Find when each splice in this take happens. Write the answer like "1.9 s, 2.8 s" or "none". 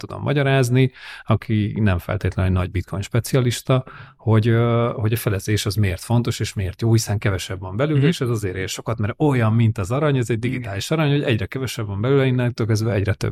none